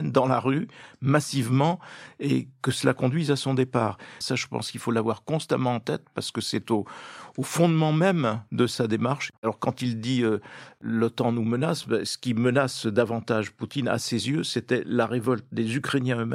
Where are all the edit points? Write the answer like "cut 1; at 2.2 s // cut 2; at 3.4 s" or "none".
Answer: cut 1; at 4.2 s // cut 2; at 9.4 s